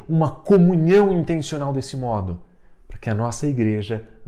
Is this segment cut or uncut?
uncut